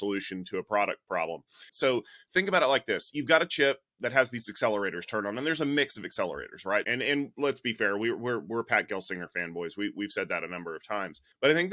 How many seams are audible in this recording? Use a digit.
2